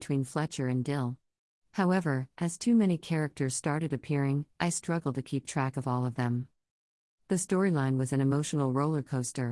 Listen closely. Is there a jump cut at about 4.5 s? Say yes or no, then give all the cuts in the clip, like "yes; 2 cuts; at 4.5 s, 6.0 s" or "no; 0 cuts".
yes; 1 cut; at 4.5 s